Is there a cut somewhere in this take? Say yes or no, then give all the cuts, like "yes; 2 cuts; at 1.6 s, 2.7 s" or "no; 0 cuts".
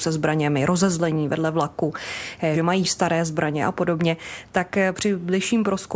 yes; 1 cut; at 2.5 s